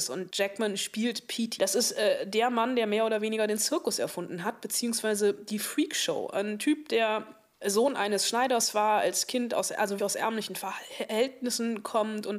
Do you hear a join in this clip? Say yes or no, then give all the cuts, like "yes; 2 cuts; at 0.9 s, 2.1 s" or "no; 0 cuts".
yes; 2 cuts; at 1.6 s, 10.0 s